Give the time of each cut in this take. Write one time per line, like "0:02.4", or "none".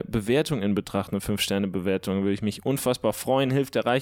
none